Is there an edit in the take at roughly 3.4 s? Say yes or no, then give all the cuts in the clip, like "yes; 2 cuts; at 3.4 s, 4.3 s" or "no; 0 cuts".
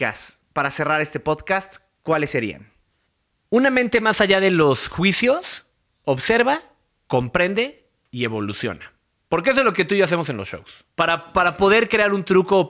no; 1 cut; at 10.9 s